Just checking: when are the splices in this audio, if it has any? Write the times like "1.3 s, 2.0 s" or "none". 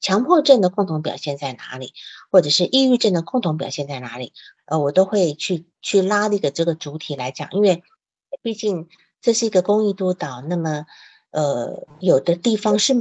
4.6 s